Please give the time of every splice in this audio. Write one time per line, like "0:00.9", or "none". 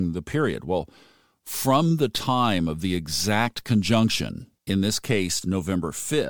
none